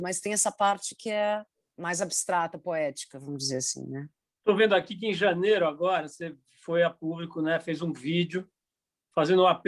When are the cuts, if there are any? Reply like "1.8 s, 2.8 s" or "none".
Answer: none